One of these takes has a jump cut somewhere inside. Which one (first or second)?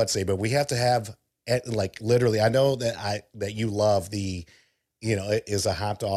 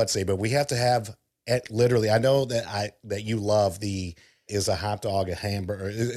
second